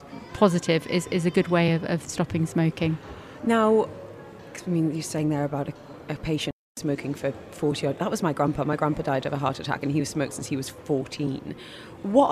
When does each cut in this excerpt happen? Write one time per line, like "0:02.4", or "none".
none